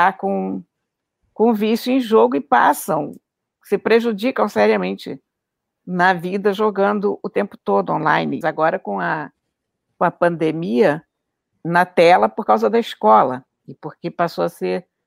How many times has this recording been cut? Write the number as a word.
two